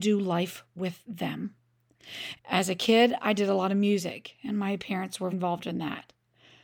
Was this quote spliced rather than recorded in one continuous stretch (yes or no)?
yes